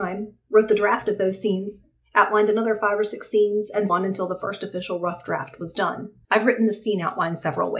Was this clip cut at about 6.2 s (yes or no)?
yes